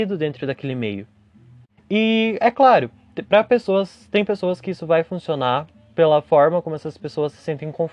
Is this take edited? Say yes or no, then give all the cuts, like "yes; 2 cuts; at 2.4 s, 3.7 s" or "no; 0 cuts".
yes; 1 cut; at 1.8 s